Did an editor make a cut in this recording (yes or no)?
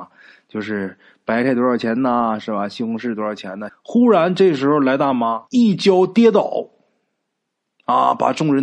yes